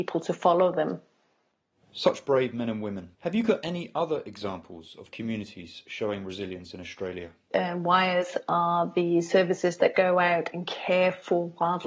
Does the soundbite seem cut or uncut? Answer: cut